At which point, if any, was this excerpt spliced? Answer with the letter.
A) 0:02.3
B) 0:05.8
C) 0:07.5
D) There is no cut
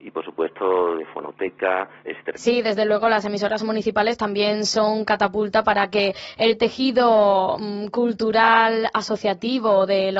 A